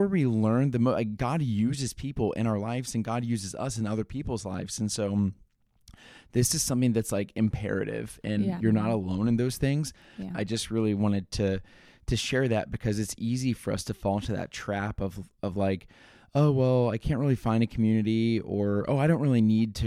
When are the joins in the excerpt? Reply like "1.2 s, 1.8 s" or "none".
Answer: 8.6 s, 10.3 s